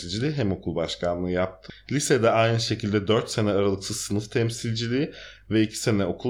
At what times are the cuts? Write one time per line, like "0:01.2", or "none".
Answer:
none